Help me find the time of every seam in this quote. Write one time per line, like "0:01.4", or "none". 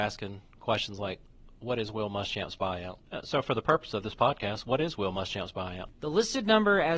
0:05.9